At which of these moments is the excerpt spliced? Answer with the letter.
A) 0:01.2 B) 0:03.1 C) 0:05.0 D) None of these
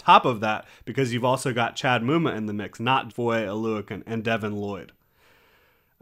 B